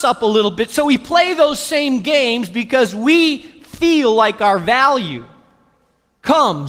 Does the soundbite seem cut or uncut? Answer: uncut